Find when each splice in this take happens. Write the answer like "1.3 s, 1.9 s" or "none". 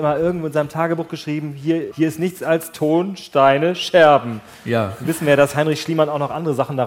1.9 s